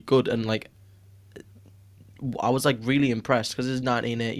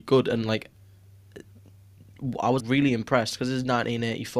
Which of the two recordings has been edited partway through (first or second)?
second